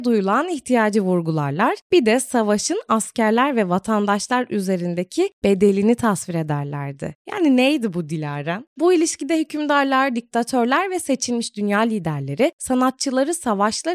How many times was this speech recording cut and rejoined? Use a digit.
1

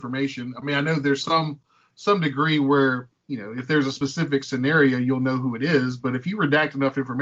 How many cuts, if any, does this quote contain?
1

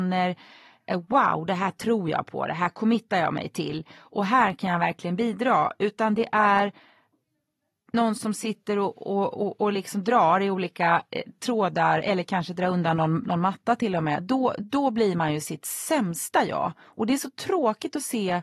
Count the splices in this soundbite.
0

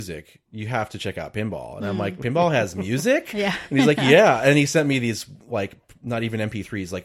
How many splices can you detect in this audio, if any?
0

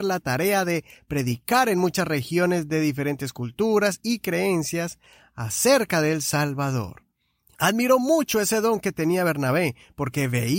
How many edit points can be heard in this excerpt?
1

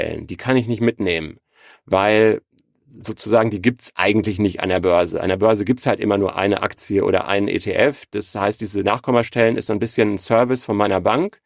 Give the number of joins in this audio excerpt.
0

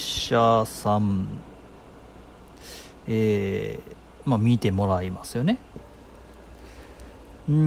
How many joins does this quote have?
1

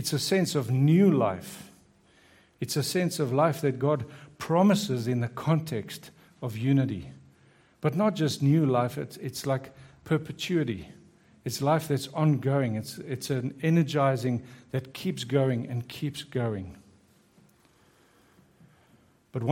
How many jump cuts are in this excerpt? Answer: 0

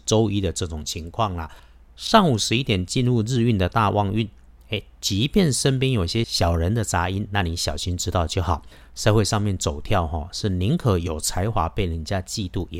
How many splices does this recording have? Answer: 0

